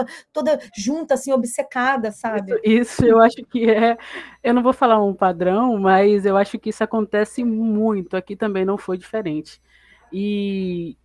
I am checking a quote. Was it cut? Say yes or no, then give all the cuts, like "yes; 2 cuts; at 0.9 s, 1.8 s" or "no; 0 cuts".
no; 0 cuts